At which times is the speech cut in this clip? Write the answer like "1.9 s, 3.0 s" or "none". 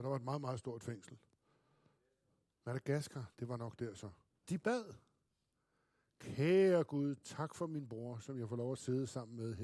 2.6 s, 4.4 s